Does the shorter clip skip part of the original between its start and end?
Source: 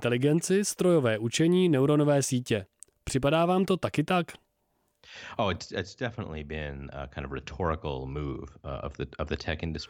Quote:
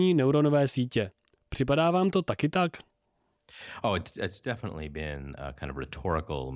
no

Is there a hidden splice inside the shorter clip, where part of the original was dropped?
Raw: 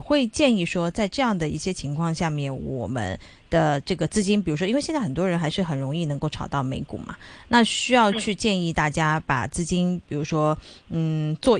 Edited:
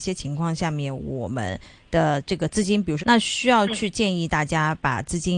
yes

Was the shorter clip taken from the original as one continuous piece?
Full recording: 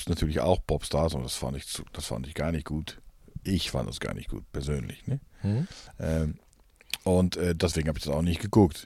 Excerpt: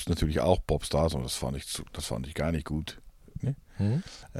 no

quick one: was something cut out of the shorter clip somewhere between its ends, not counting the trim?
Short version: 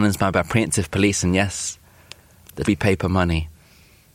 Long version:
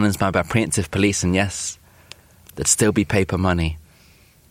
yes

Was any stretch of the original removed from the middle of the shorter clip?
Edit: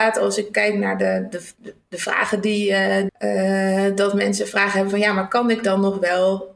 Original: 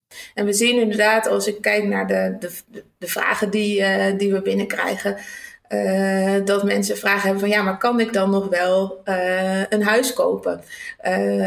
yes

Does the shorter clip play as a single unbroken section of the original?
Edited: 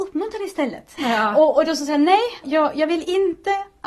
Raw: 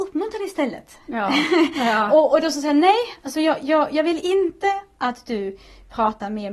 no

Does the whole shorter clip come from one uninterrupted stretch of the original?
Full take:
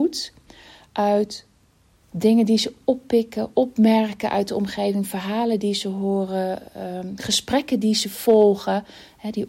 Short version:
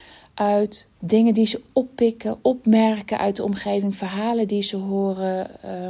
no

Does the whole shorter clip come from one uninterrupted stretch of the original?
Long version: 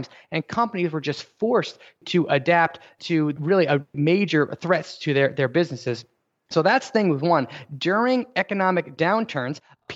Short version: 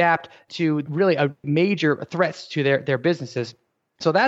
yes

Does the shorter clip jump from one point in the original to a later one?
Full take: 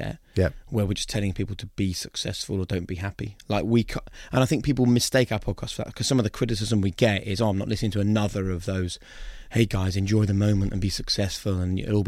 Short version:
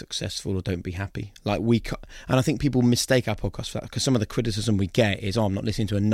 no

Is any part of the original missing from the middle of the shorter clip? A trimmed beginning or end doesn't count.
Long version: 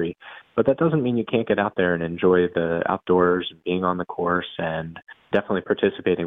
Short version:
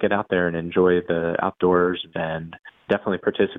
yes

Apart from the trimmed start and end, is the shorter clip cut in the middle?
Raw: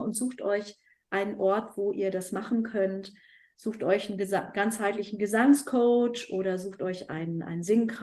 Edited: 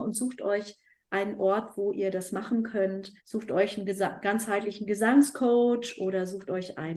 yes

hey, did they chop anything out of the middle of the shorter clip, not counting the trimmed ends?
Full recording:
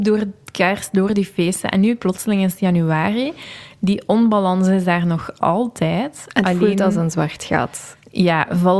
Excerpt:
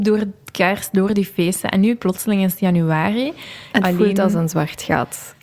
yes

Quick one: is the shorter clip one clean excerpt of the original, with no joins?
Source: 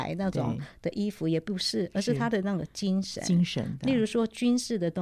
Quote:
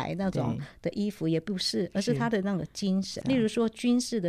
no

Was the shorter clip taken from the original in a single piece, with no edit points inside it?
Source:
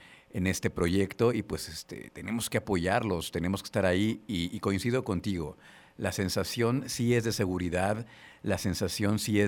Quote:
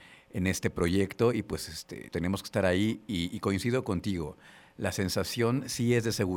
no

